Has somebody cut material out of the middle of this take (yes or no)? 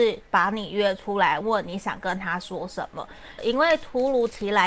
yes